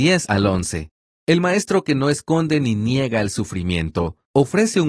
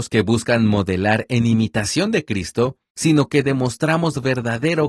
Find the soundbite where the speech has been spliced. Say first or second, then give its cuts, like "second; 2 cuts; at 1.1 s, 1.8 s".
second; 1 cut; at 2.9 s